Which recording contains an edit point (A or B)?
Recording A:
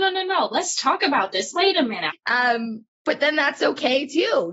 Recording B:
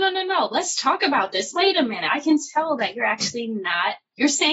A